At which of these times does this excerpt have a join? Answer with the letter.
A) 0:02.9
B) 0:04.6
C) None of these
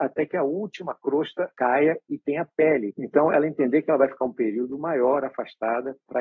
A